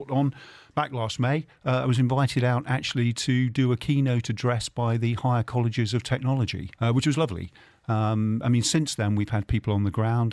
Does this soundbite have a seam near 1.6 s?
no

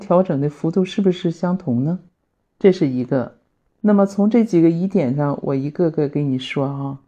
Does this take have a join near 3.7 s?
yes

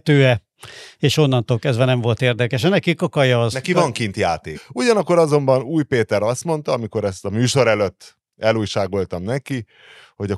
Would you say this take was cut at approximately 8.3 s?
yes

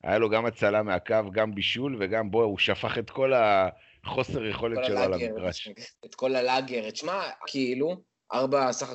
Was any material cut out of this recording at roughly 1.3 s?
no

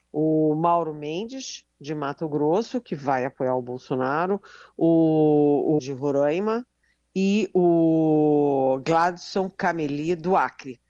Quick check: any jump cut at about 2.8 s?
no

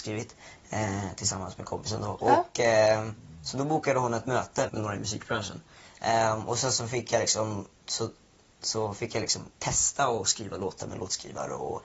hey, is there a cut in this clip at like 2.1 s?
no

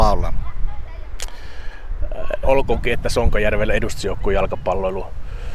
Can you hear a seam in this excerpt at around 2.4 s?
yes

